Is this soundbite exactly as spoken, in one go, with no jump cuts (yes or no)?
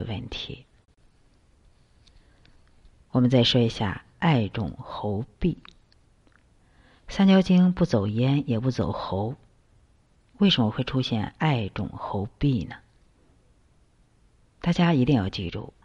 yes